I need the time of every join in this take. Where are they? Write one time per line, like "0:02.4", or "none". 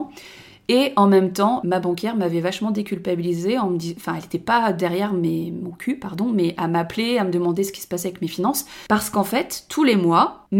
none